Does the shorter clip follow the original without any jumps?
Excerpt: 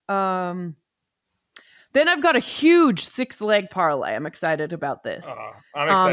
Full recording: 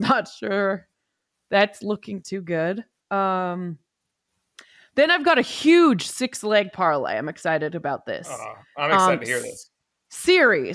yes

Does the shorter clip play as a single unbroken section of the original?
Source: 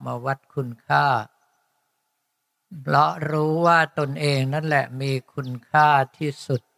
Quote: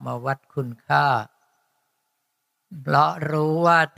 yes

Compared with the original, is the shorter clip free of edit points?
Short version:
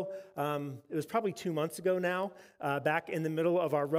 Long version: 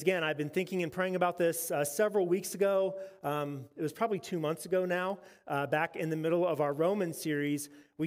yes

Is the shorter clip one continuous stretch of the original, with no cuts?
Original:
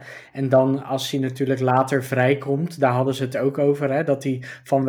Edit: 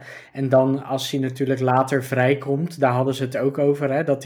yes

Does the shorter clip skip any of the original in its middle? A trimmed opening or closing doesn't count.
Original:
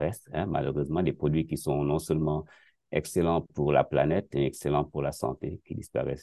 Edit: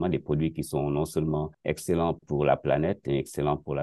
yes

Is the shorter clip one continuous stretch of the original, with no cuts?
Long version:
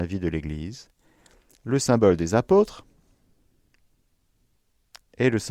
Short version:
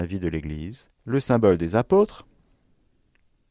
no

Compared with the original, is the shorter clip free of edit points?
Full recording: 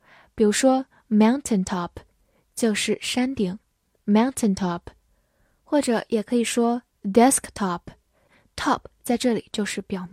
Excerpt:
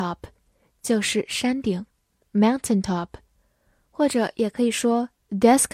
yes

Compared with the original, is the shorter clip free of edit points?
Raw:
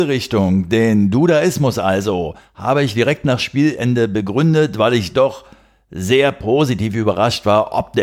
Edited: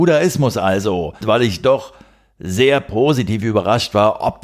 no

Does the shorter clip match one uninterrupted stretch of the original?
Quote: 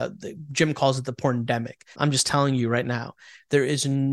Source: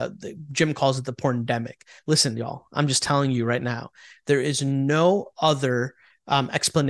no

